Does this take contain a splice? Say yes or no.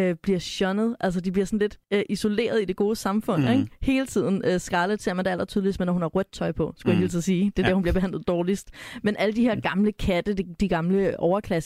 yes